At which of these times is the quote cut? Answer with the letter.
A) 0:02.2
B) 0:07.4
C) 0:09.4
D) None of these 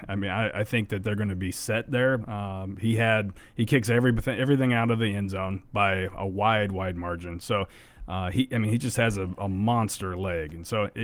A